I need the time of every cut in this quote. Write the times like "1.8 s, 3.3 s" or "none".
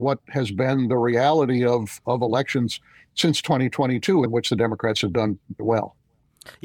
4.3 s, 5.6 s